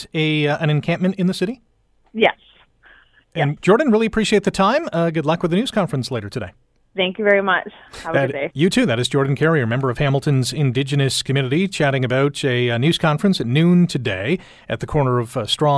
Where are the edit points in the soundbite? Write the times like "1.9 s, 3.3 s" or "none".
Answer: 3.6 s